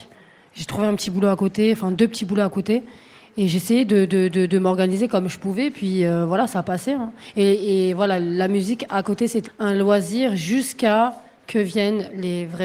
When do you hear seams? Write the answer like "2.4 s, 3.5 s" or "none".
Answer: 9.4 s